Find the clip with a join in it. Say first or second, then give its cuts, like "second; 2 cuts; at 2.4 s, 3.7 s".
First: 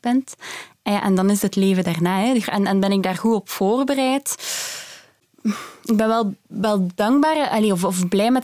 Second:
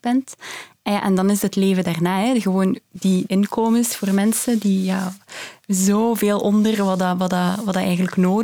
first; 1 cut; at 2.4 s